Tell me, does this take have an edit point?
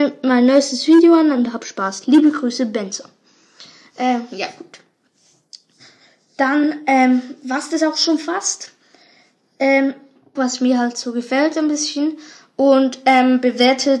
yes; 1 cut; at 10.4 s

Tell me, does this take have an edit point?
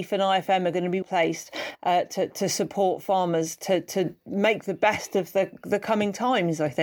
yes; 1 cut; at 1.0 s

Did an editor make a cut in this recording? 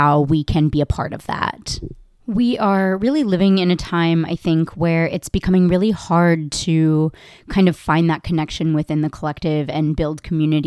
yes; 1 cut; at 2.1 s

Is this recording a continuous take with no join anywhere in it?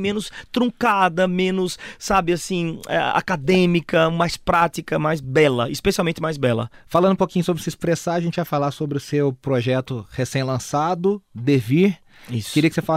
yes; 0 cuts

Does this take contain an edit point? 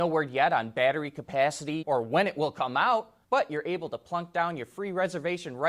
yes; 2 cuts; at 1.8 s, 3.2 s

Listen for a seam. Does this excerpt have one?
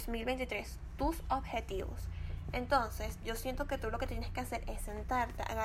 no; 0 cuts

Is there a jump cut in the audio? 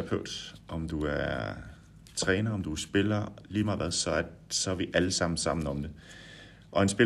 no; 0 cuts

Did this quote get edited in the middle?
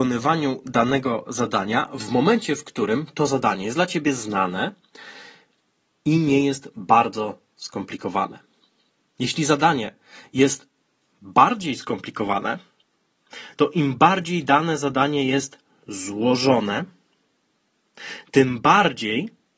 no; 0 cuts

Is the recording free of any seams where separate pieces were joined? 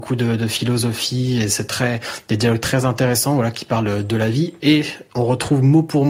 yes; 0 cuts

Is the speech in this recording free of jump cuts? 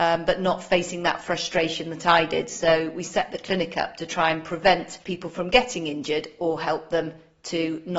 no; 1 cut; at 5.0 s

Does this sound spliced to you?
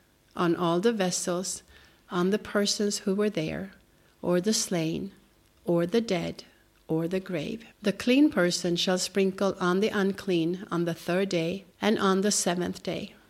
yes; 3 cuts; at 4.1 s, 7.7 s, 11.7 s

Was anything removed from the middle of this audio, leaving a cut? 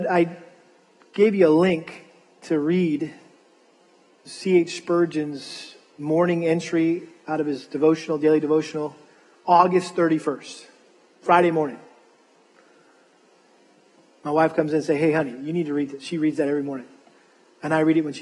no; 0 cuts

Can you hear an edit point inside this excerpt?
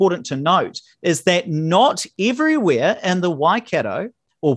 no; 0 cuts

